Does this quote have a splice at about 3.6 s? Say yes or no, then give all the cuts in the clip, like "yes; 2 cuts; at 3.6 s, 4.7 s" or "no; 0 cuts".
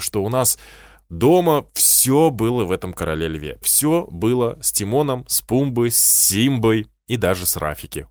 yes; 1 cut; at 3.6 s